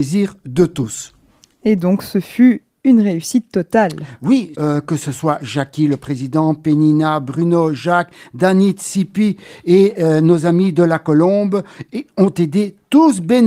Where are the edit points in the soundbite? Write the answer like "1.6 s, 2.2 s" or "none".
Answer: 4.5 s